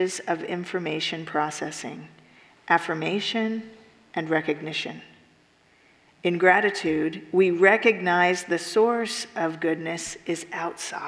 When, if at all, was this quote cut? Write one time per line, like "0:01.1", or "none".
0:06.1

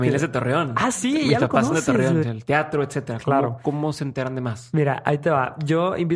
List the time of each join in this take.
0:02.2

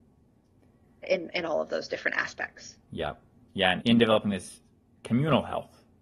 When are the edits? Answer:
0:01.0
0:03.8

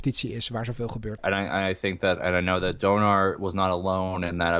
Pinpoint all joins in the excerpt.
0:01.2

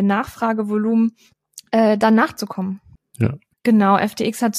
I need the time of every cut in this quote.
0:03.5

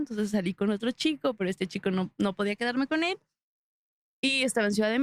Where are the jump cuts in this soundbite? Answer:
none

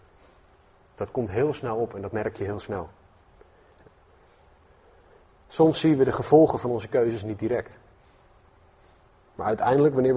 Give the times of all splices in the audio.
0:06.0

